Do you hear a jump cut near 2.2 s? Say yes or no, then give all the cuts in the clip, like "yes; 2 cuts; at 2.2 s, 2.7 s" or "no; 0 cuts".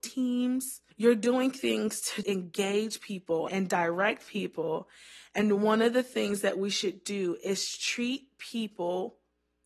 yes; 3 cuts; at 0.9 s, 2.2 s, 3.5 s